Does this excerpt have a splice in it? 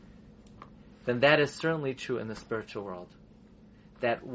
no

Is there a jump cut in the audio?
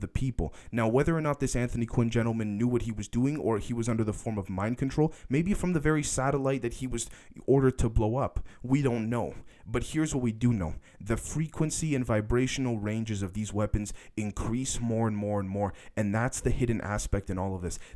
no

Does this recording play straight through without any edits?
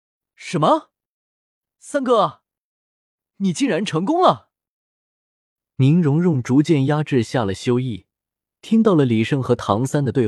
yes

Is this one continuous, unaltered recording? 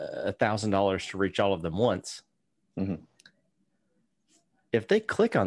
yes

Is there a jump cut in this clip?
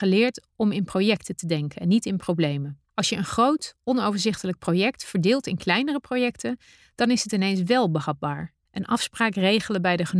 yes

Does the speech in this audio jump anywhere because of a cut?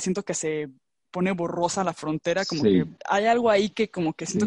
no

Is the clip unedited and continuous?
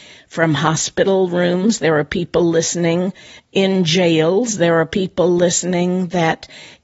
yes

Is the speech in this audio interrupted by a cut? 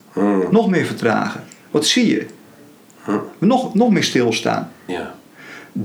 yes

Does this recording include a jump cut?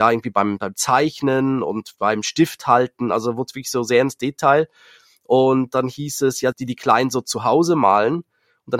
yes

